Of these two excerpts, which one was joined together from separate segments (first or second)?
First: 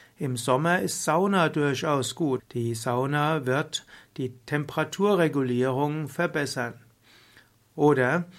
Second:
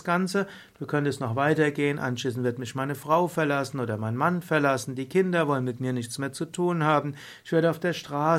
first